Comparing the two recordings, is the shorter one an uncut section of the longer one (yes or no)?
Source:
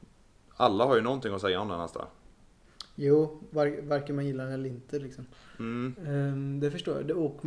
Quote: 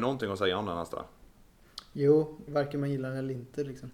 no